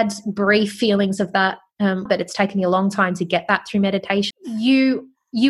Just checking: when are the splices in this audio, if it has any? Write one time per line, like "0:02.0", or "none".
0:02.1
0:04.3